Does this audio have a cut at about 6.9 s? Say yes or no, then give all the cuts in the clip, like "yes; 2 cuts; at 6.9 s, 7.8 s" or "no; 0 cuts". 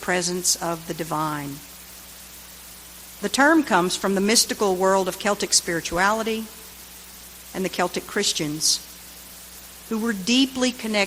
no; 1 cut; at 3.1 s